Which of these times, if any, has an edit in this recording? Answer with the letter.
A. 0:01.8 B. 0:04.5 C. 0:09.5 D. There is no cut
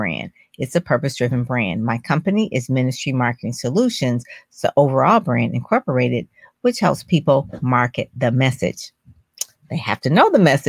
D